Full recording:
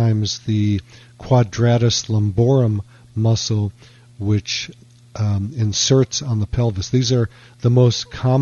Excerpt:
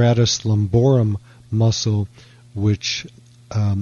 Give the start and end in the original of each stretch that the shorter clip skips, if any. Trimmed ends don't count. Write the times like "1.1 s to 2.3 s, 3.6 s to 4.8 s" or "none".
none